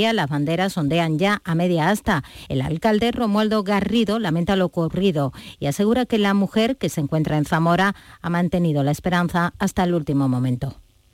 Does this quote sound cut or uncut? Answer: uncut